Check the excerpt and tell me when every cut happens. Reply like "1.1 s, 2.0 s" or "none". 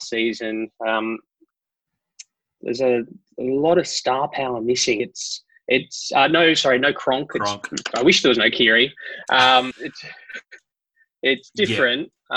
5.0 s, 9.7 s